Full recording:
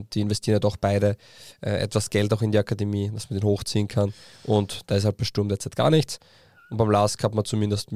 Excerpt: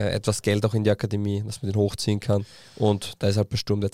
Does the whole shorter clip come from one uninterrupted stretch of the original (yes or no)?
yes